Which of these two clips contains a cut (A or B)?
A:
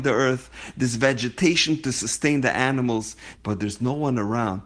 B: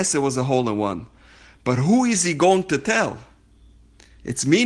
A